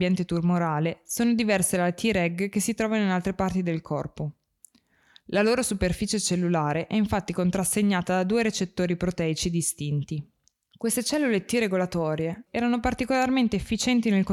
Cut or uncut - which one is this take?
cut